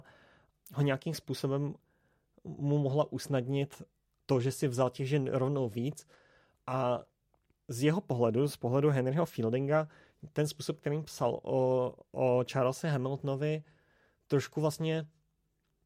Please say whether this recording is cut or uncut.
uncut